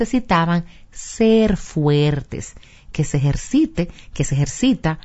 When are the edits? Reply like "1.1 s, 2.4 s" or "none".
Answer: none